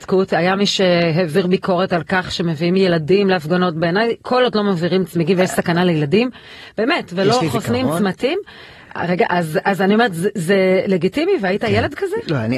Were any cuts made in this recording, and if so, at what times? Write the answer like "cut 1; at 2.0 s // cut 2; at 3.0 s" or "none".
none